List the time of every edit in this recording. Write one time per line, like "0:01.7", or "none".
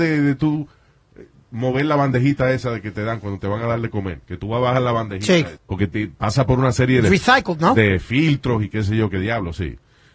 0:05.6